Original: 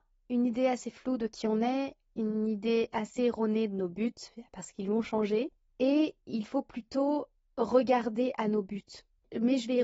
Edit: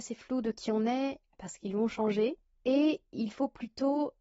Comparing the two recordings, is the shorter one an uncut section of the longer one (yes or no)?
no